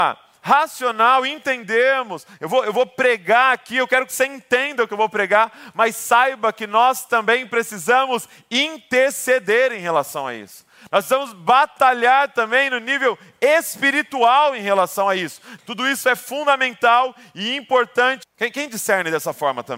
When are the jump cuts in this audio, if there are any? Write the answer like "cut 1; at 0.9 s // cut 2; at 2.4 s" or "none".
cut 1; at 15.6 s // cut 2; at 18.2 s